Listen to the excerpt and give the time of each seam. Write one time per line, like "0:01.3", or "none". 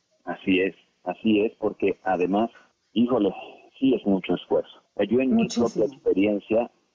none